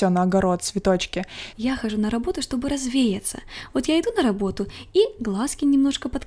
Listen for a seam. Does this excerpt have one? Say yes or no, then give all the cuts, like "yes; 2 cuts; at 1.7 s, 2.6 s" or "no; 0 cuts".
yes; 1 cut; at 1.5 s